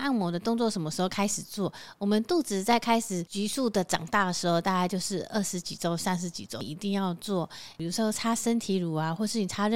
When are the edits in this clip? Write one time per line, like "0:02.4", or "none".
none